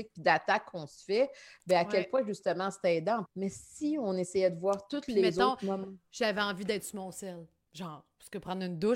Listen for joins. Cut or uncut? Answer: cut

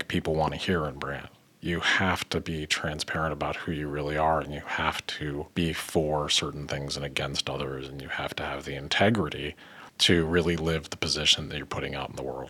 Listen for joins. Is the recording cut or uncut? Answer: cut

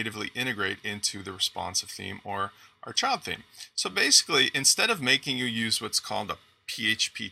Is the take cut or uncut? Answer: uncut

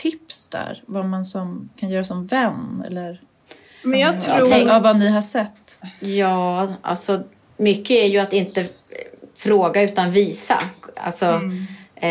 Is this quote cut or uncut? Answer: uncut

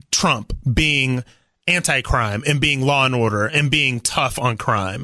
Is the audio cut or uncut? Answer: uncut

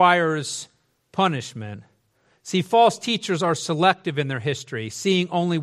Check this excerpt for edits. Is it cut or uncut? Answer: uncut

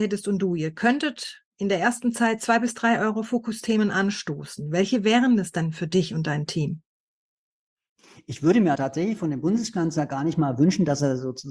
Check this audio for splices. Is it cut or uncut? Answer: cut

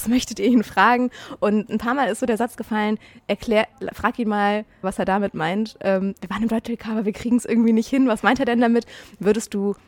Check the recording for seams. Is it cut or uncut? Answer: cut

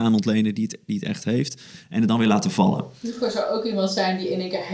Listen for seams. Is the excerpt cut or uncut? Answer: uncut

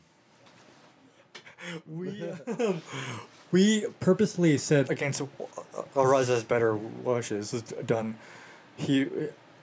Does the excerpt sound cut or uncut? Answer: cut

